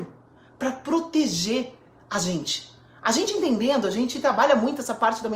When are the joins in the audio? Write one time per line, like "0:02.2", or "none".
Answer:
none